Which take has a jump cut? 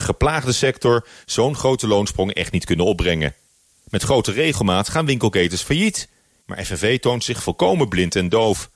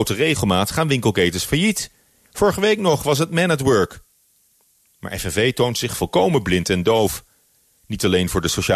first; 1 cut; at 6.4 s

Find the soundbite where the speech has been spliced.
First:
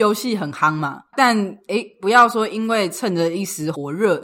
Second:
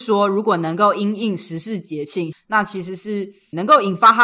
second; 1 cut; at 2.3 s

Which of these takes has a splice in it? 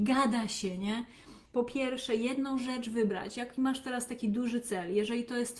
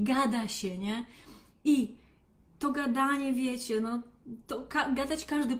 first; 1 cut; at 1.5 s

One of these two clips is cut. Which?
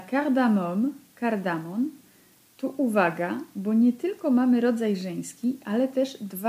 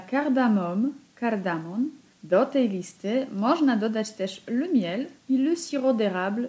second; 2 cuts; at 2.1 s, 5.2 s

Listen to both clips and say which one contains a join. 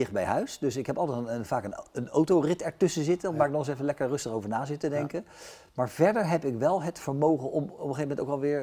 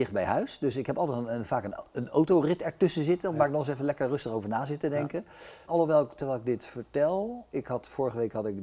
second; 2 cuts; at 5.7 s, 7.5 s

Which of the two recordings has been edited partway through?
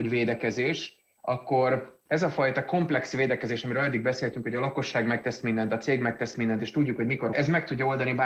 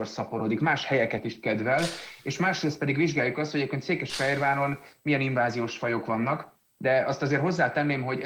first; 1 cut; at 7.3 s

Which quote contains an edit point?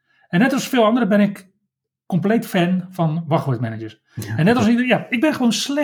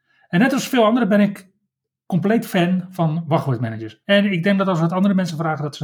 second; 1 cut; at 4.0 s

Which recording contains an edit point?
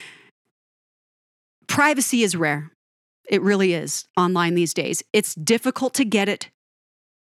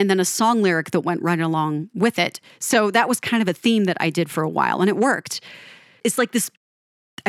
second; 1 cut; at 6.0 s

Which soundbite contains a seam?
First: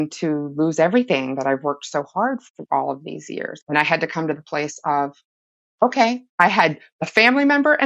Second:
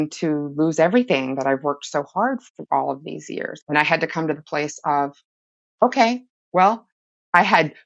first; 1 cut; at 6.3 s

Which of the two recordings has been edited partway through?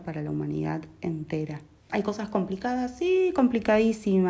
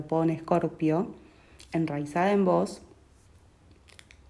first; 1 cut; at 1.9 s

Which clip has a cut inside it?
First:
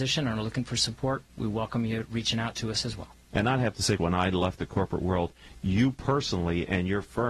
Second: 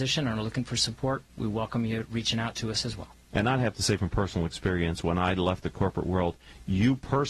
first; 1 cut; at 4.0 s

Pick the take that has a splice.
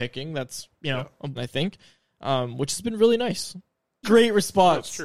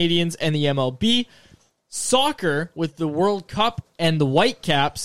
first; 2 cuts; at 1.4 s, 4.0 s

